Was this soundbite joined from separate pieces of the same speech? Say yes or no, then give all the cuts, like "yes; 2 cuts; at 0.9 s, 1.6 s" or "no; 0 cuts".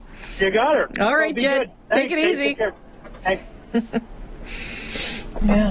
no; 0 cuts